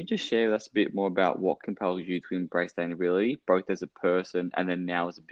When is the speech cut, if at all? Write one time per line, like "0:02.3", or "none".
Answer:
none

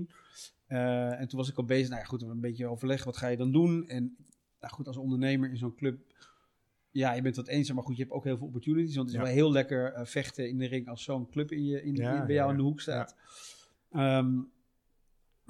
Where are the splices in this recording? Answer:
none

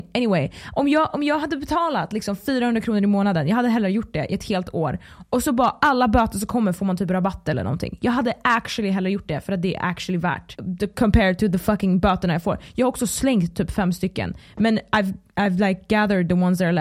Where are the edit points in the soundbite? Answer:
none

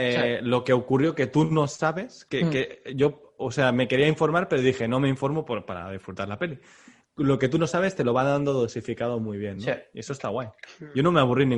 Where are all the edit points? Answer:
none

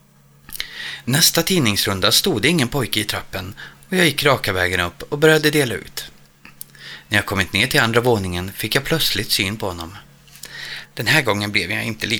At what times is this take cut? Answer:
0:10.9

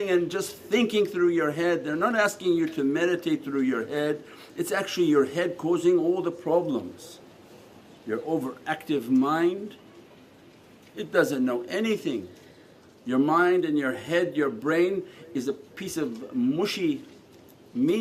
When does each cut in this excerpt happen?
none

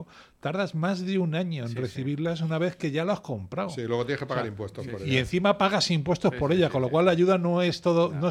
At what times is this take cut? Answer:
none

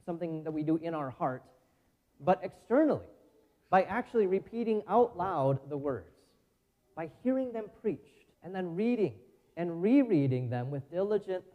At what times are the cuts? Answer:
0:08.3

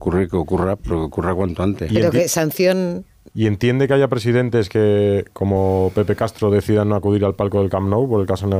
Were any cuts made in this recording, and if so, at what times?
0:03.3

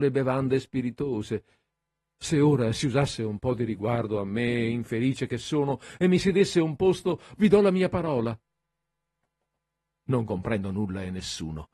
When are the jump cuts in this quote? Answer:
0:07.4
0:09.9

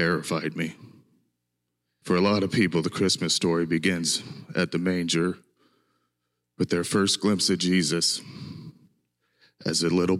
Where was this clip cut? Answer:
0:02.0

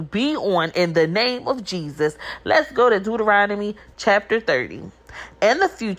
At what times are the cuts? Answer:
none

